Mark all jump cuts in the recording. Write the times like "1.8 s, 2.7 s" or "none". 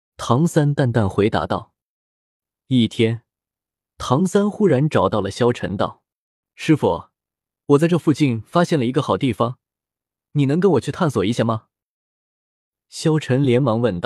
2.5 s

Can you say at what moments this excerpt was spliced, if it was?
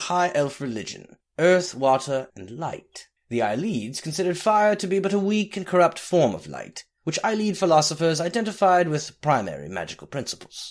2.3 s

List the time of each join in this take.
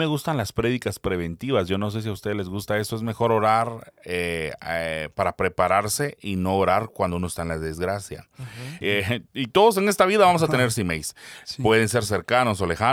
8.8 s

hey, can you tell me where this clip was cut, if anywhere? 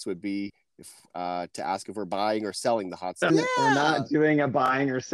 3.3 s

